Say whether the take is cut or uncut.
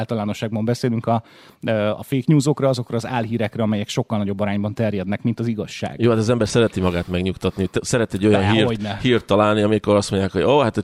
uncut